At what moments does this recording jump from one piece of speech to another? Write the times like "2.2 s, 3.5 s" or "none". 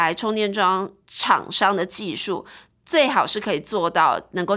none